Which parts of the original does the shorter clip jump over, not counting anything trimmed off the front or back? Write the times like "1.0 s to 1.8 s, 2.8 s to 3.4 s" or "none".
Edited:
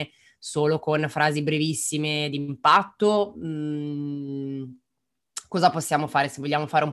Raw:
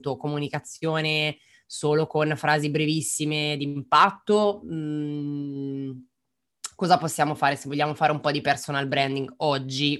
none